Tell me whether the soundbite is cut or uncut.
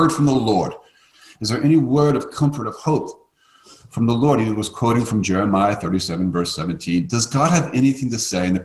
uncut